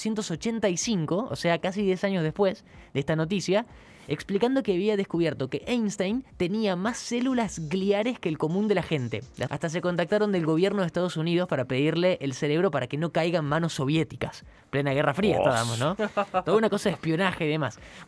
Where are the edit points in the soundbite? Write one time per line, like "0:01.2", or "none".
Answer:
0:06.3
0:09.5

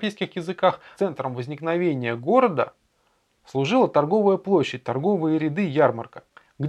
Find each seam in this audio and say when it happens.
0:00.9

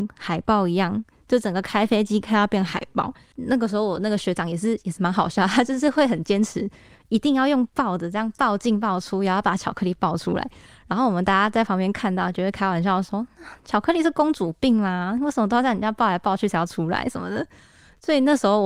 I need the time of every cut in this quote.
0:05.0

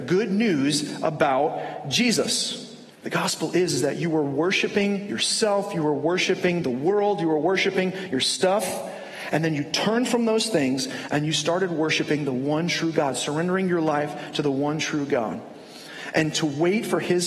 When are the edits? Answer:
0:02.9

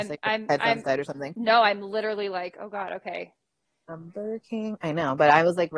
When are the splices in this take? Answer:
0:03.9

